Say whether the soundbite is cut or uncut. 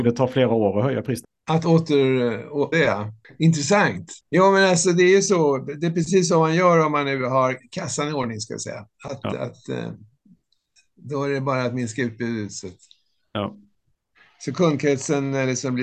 cut